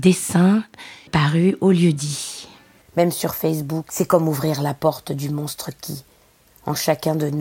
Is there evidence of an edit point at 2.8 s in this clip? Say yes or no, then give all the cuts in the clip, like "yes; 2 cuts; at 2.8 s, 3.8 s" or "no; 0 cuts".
yes; 2 cuts; at 2.8 s, 3.9 s